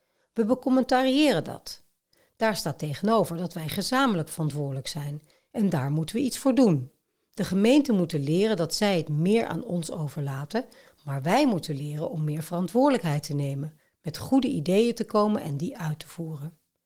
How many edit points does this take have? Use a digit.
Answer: 0